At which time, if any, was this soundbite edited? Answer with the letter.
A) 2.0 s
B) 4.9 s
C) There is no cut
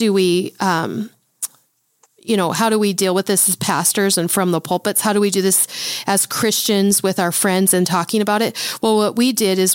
C